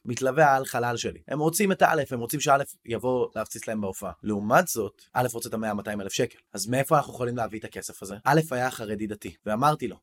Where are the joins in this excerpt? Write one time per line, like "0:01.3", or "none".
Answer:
none